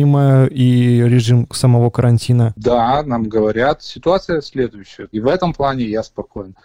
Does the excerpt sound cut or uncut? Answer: cut